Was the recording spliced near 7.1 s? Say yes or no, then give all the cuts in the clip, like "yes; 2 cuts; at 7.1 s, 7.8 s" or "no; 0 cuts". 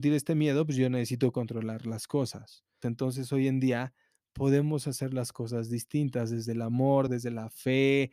yes; 2 cuts; at 2.8 s, 7.1 s